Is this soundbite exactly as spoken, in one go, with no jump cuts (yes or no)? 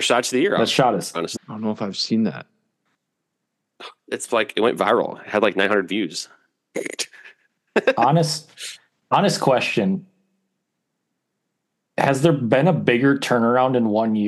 no